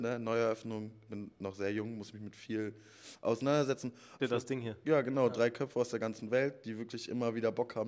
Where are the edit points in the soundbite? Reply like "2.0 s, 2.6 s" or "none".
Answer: 4.2 s